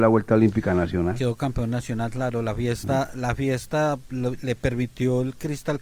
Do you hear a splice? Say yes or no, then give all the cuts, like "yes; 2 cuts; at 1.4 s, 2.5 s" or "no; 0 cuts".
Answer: no; 0 cuts